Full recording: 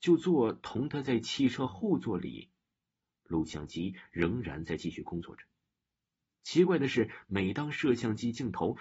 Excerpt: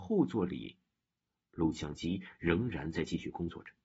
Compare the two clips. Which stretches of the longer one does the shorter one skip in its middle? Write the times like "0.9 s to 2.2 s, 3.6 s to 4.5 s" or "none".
none